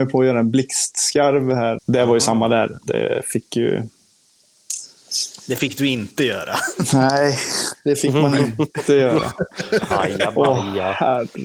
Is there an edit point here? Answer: yes; 1 cut; at 1.8 s

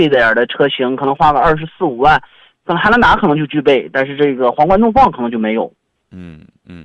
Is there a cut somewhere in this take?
no; 0 cuts

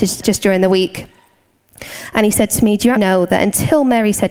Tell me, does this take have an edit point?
yes; 1 cut; at 3.0 s

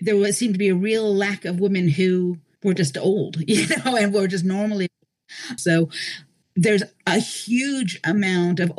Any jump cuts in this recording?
yes; 1 cut; at 5.6 s

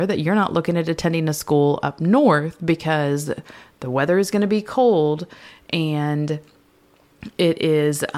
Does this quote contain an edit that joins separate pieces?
no; 0 cuts

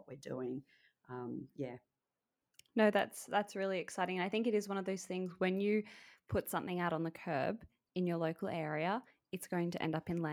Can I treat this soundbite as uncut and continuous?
yes; 0 cuts

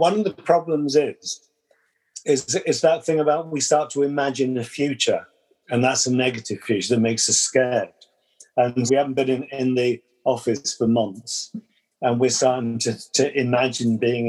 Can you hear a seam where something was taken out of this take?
yes; 1 cut; at 8.9 s

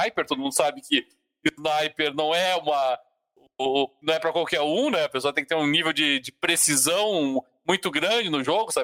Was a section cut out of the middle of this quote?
no; 0 cuts

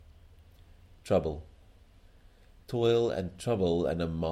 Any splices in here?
yes; 1 cut; at 1.0 s

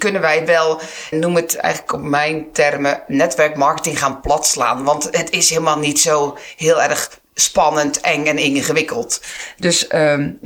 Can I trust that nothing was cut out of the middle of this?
no; 1 cut; at 1.1 s

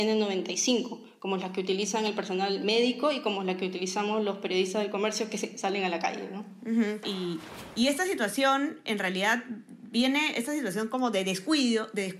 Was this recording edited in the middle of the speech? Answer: yes; 1 cut; at 7.0 s

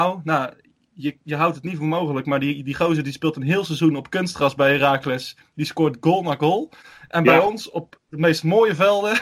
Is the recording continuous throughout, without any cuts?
yes; 0 cuts

